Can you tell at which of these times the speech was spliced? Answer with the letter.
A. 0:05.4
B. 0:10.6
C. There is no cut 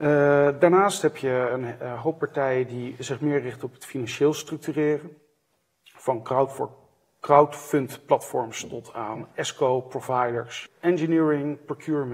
B